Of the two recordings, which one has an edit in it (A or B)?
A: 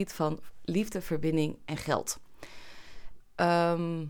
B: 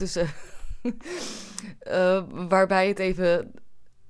A